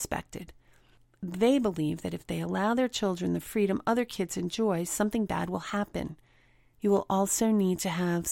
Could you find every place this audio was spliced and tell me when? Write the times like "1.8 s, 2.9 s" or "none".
6.7 s